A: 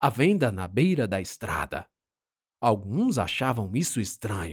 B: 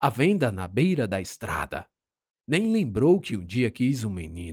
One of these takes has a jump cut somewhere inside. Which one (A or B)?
B